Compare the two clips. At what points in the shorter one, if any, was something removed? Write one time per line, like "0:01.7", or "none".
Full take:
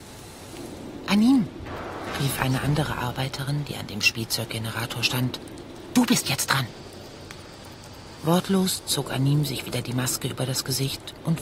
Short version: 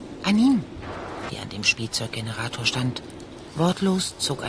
0:01.3
0:03.5

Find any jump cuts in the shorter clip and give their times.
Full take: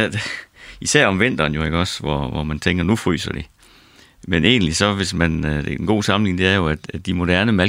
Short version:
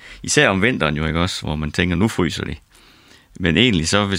0:01.4

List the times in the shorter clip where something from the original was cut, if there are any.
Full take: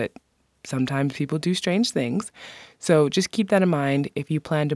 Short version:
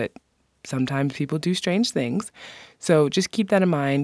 none

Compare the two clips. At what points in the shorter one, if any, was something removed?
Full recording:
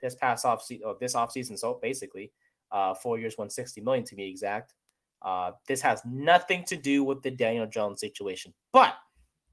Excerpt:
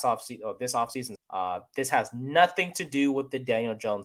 0:01.2

